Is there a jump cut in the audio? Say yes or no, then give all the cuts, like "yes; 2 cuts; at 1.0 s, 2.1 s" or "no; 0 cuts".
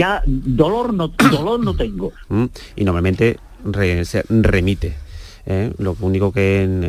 yes; 1 cut; at 2.3 s